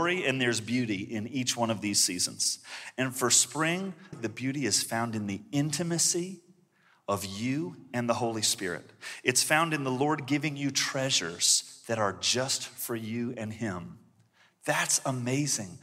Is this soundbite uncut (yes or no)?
no